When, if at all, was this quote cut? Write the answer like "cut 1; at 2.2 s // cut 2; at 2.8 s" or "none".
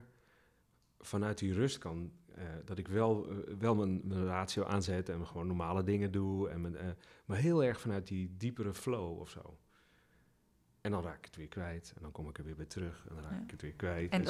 none